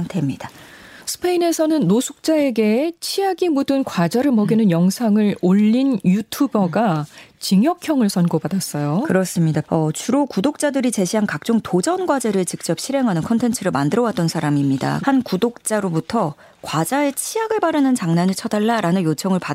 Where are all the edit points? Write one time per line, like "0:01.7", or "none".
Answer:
0:09.6
0:15.0